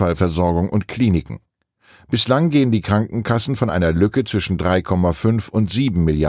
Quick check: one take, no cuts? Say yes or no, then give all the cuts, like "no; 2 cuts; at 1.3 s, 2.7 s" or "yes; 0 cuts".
yes; 0 cuts